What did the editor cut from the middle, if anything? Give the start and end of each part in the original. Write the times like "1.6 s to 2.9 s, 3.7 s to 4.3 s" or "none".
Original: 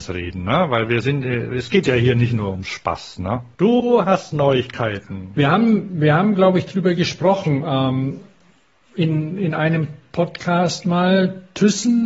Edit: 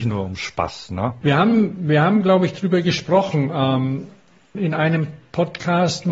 3.5 s to 5.3 s, 8.7 s to 9.4 s